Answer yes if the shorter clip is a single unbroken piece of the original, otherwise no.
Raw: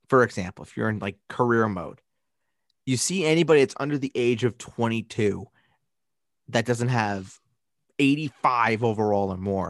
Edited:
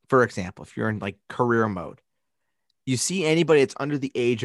yes